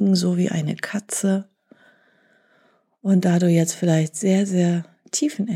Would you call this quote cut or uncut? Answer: uncut